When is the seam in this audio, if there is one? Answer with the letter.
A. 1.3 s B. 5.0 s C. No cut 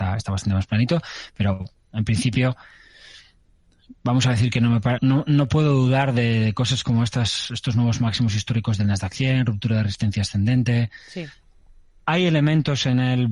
B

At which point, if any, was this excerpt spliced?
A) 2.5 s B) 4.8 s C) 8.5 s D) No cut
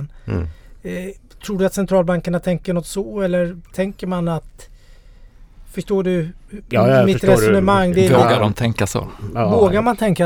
D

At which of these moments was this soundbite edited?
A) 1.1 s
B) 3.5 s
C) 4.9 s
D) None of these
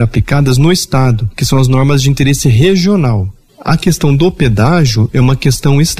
B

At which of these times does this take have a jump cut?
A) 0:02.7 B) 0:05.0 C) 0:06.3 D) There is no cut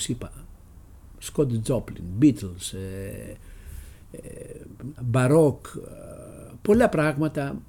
B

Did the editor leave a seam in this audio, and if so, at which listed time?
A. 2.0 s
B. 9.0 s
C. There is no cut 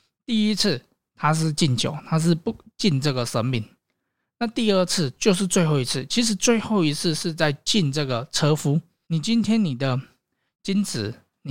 B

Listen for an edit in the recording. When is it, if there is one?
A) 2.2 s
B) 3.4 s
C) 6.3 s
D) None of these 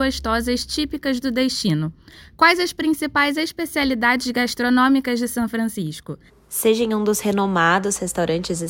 C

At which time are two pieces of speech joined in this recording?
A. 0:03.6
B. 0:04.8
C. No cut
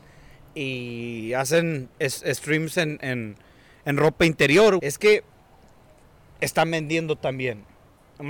B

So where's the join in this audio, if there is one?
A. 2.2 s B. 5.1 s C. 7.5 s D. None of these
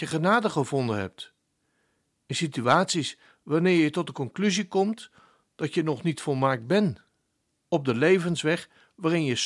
C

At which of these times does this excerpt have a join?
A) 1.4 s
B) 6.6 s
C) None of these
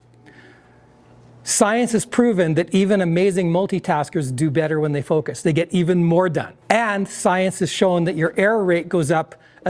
B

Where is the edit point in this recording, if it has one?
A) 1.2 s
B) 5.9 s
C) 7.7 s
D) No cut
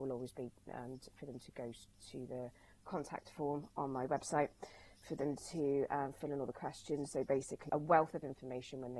C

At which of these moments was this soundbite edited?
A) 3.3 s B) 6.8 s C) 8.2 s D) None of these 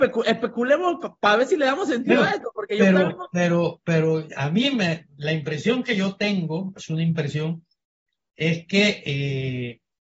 B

